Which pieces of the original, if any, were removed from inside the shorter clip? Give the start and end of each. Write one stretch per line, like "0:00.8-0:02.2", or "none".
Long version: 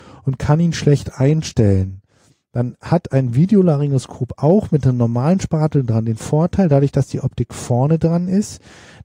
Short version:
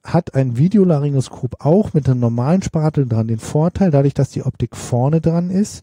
none